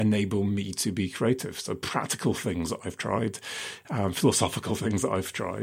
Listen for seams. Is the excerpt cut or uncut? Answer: uncut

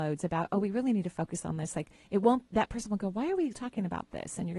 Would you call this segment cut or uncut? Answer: cut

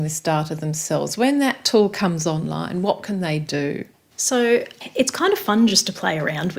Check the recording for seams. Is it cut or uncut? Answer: uncut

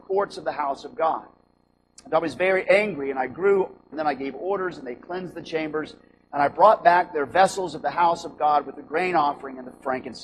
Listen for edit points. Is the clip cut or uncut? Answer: cut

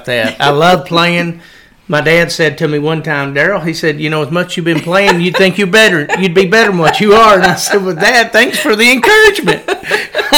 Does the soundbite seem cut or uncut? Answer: uncut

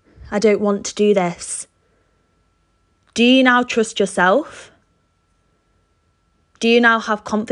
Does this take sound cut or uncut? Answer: uncut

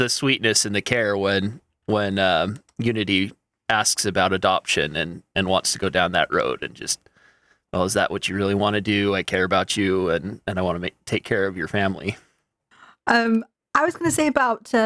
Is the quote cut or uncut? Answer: uncut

